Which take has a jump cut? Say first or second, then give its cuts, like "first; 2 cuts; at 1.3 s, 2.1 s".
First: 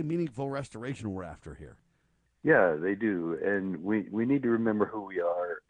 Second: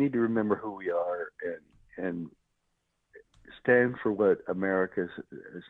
first; 1 cut; at 2.3 s